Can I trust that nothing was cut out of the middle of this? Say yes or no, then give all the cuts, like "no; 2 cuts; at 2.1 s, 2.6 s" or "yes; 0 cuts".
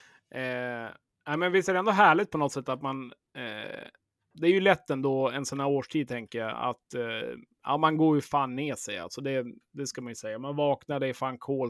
yes; 0 cuts